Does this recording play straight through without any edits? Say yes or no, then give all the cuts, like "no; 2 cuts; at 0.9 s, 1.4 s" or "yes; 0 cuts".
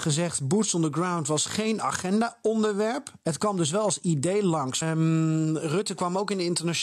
no; 1 cut; at 4.8 s